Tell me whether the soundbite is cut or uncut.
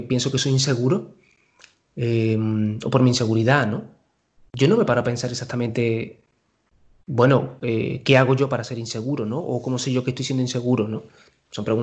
uncut